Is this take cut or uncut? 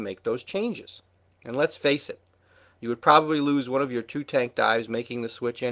uncut